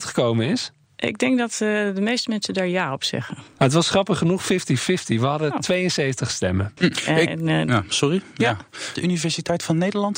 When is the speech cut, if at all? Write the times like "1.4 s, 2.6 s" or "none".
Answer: 6.8 s, 9.0 s